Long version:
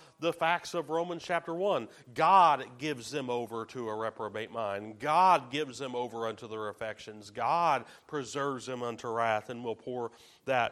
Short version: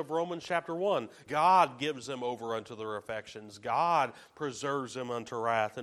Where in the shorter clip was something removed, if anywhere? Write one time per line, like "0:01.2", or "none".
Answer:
0:01.3